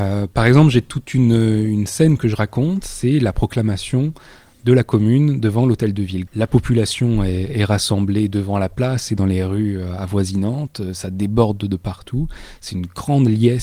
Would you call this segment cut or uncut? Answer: cut